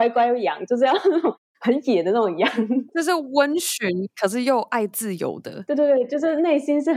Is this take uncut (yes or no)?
yes